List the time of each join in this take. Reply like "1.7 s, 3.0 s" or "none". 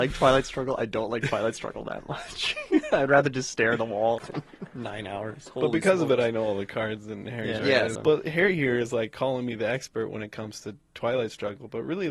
4.2 s, 7.9 s

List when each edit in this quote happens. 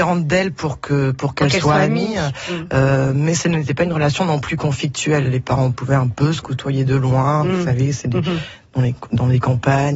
none

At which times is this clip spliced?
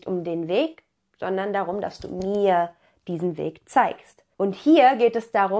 4.3 s

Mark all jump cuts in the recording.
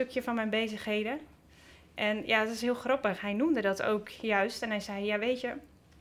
none

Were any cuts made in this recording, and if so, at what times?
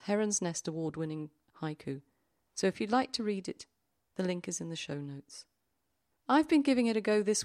6.1 s

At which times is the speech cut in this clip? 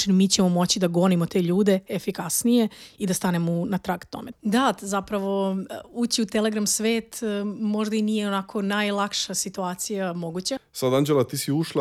4.3 s, 10.6 s

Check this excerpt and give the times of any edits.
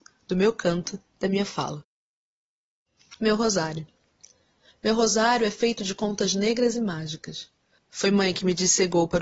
7.8 s

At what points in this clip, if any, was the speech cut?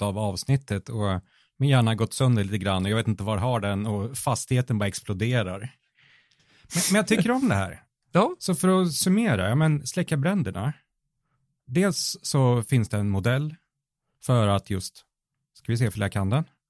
none

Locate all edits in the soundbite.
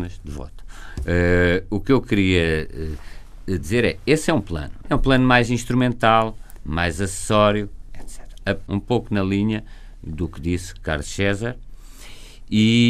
4.8 s, 8.7 s

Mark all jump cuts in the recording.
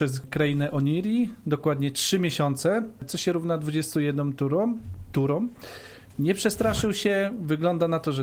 6.1 s

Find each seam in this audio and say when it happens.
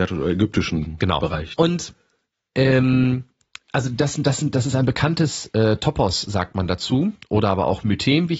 1.5 s

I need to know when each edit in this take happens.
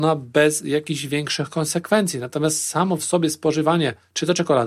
none

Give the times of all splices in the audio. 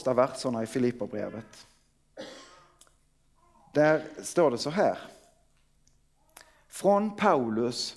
none

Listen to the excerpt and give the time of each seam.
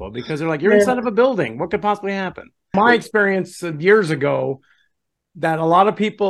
2.7 s

